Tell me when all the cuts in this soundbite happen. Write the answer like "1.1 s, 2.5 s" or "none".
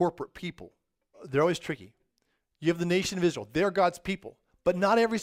1.1 s